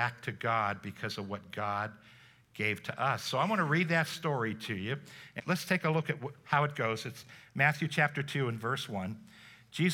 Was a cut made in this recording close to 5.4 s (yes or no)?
yes